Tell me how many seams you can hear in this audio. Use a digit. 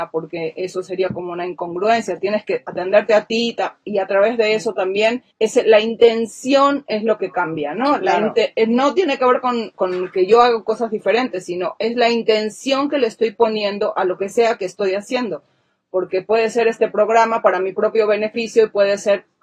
1